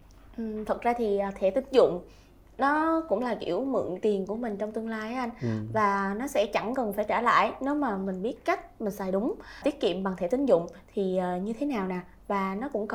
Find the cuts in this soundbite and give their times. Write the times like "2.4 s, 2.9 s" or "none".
none